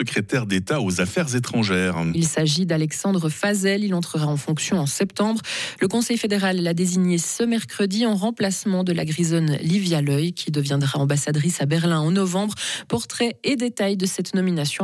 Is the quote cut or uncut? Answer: uncut